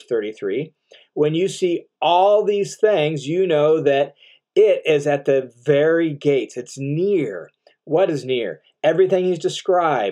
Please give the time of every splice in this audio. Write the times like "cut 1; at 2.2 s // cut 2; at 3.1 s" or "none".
none

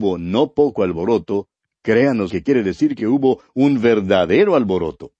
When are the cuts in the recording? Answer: cut 1; at 2.3 s

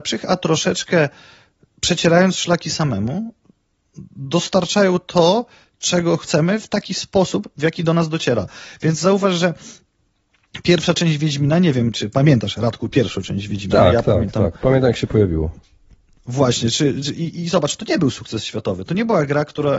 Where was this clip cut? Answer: none

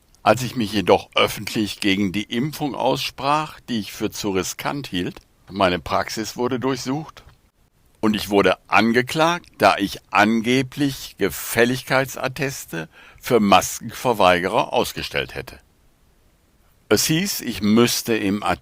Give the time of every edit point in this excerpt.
cut 1; at 5.5 s

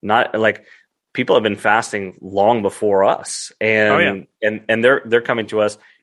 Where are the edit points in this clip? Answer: none

